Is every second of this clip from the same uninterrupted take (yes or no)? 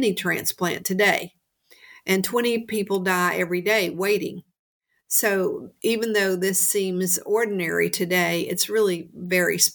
yes